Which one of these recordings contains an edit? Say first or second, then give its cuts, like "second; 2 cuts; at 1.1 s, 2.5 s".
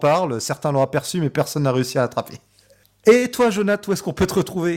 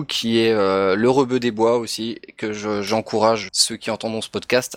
second; 1 cut; at 3.5 s